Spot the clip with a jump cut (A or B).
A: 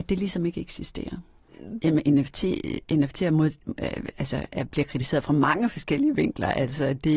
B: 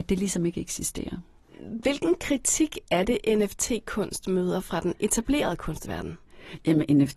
A